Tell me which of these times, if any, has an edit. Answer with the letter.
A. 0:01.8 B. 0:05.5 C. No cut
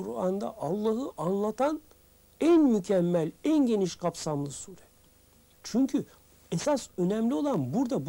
B